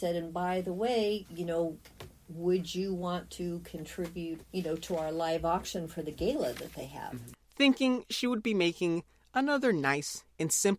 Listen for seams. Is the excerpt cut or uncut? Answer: cut